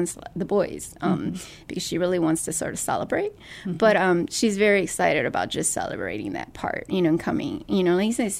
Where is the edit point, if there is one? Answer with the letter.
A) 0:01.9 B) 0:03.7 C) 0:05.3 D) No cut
D